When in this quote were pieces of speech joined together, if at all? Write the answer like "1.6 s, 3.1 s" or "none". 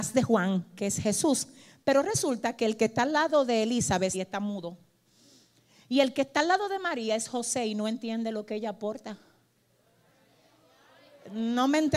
4.1 s